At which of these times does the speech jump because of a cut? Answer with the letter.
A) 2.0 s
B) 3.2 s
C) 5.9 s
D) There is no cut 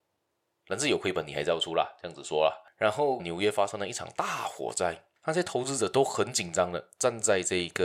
B